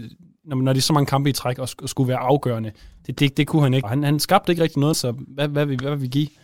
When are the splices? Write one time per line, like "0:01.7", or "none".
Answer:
0:03.8
0:04.9